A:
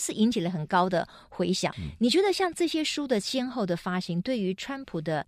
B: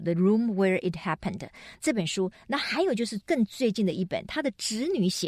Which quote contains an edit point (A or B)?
A